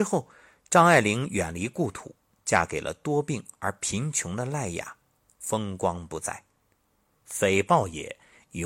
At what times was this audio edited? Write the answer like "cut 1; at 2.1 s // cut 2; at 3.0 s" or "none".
cut 1; at 7.2 s